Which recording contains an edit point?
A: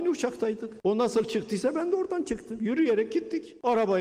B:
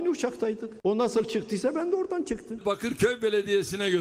B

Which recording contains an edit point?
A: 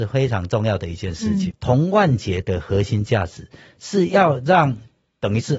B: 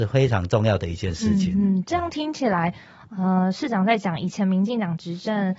A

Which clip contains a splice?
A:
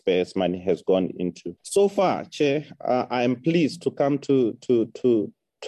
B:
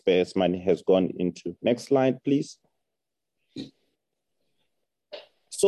A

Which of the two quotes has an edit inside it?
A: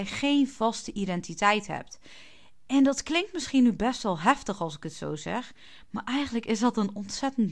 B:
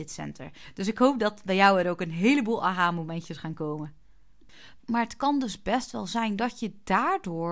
B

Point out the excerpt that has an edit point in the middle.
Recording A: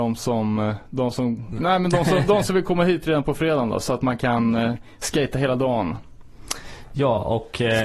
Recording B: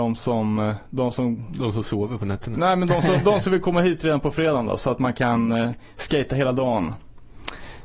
A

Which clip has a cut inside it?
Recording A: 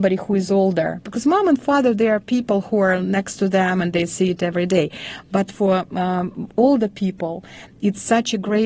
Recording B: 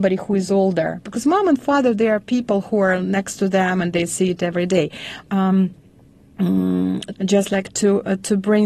B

